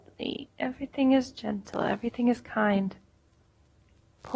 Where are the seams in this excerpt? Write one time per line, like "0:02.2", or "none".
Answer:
none